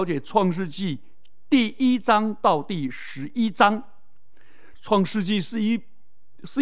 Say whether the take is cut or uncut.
cut